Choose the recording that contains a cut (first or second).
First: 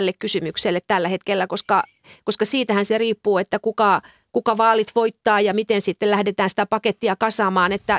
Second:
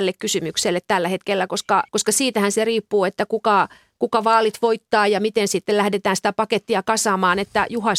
second